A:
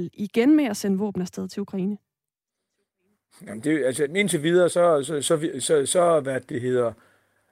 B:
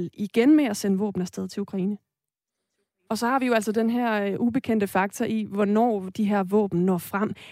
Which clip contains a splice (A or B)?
B